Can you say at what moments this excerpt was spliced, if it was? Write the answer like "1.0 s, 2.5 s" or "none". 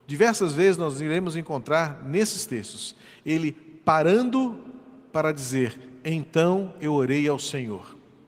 none